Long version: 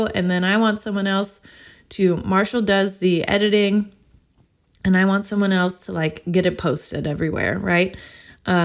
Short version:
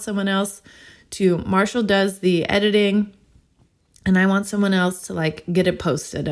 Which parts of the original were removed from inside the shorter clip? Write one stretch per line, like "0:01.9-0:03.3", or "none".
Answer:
none